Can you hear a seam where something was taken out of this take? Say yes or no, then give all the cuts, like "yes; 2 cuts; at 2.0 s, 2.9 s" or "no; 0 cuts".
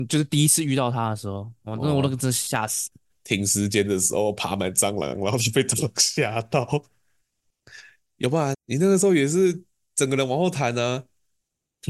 yes; 2 cuts; at 3.1 s, 8.5 s